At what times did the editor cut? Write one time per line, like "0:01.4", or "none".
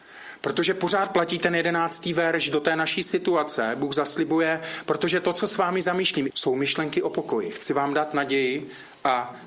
0:06.3